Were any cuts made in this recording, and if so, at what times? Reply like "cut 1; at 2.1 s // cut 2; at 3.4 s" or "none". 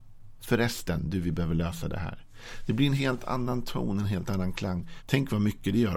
cut 1; at 5.0 s